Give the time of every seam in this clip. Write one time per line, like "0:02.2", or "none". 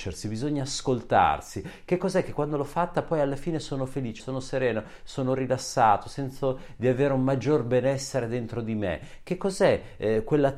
0:04.2

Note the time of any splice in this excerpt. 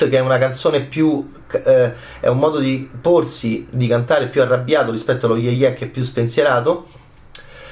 none

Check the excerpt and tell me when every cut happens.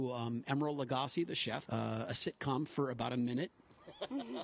0:01.6

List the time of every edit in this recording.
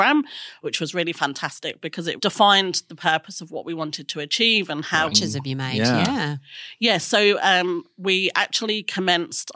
0:02.2
0:05.1

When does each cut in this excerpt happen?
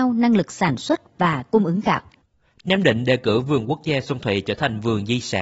none

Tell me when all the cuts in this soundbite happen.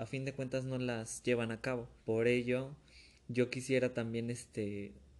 0:02.0

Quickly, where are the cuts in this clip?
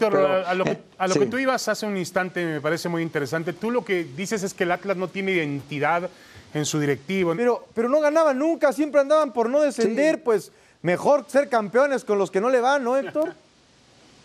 0:07.3

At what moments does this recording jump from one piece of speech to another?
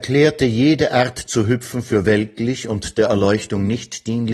none

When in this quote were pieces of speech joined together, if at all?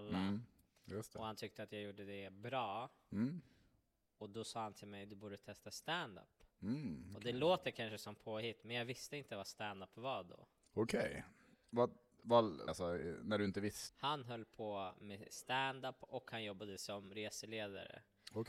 0:12.7
0:13.9

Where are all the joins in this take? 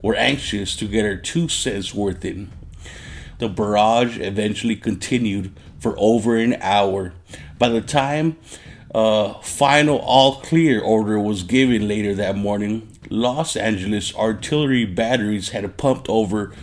0:03.4

